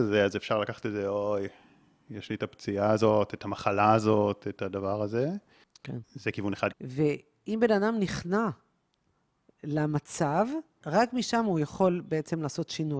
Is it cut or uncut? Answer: cut